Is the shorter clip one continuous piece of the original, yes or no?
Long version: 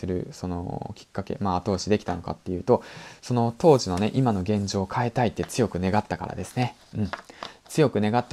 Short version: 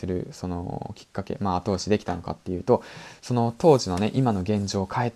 yes